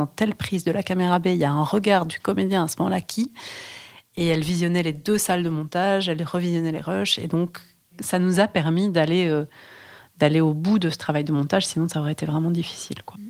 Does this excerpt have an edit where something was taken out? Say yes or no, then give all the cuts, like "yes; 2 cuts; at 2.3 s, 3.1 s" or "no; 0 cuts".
no; 0 cuts